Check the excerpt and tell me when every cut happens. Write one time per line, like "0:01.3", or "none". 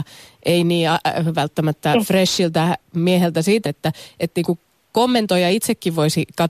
0:03.7